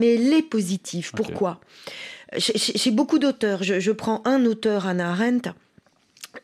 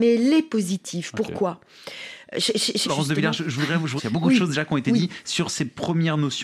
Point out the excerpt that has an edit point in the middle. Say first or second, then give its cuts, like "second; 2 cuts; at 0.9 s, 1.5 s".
second; 2 cuts; at 2.8 s, 4.0 s